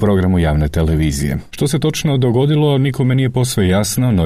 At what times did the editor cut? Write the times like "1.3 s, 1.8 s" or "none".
1.5 s